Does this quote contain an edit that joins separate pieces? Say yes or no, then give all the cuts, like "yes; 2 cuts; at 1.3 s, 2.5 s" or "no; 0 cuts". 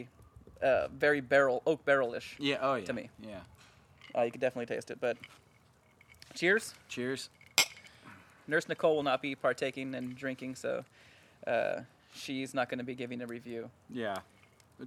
no; 0 cuts